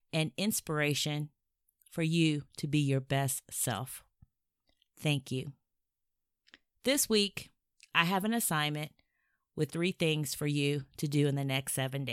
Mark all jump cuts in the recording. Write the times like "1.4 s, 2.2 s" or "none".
9.7 s